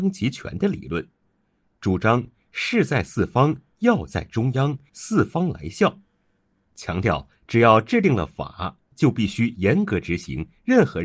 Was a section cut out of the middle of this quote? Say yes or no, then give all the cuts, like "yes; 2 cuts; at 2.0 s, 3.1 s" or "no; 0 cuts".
yes; 2 cuts; at 4.9 s, 6.6 s